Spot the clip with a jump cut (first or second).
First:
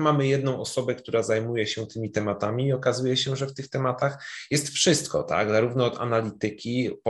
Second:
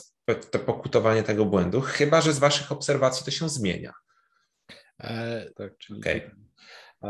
second